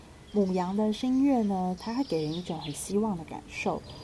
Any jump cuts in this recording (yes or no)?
yes